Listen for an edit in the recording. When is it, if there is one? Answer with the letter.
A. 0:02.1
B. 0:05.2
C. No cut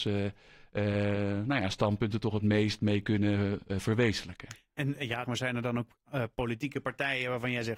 B